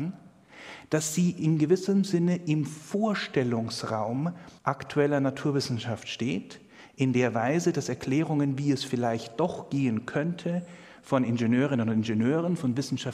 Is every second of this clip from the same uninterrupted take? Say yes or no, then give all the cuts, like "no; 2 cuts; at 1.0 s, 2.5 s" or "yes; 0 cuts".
no; 1 cut; at 4.6 s